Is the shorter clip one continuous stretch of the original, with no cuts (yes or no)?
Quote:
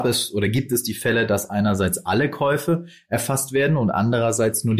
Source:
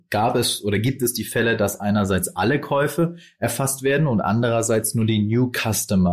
yes